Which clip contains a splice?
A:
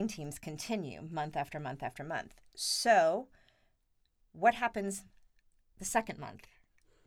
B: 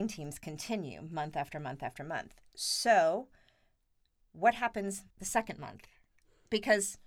B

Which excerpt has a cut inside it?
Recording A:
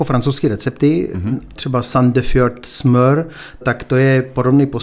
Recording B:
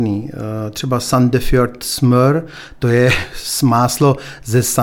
A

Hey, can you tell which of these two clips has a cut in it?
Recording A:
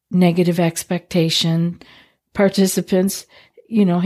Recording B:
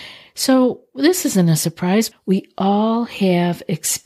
B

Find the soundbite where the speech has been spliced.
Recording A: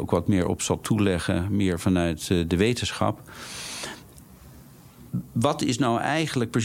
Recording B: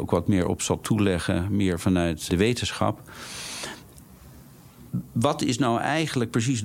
B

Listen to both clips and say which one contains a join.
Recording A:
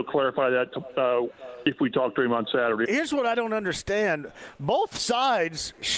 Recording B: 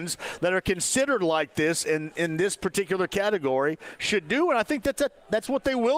A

